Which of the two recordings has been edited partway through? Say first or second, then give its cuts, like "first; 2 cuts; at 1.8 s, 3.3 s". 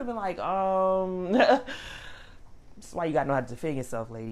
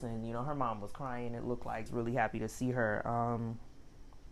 second; 1 cut; at 1.9 s